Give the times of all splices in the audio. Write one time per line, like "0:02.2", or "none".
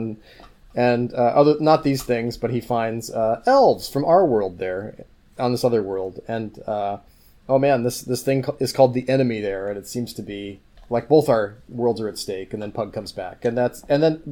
none